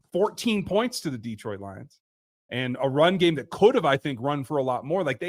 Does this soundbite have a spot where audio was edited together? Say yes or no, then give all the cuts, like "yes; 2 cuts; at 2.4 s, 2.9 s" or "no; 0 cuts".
no; 0 cuts